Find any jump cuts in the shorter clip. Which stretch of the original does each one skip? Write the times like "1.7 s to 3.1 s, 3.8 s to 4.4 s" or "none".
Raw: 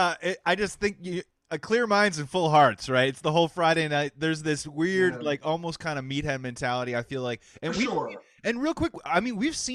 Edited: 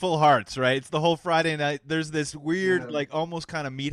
none